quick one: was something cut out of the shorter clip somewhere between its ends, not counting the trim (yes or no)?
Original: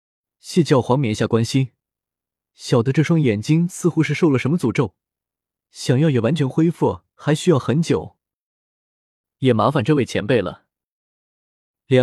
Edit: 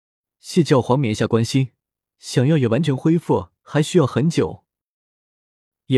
yes